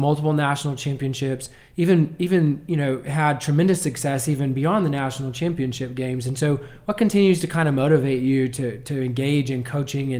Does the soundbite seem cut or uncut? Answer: uncut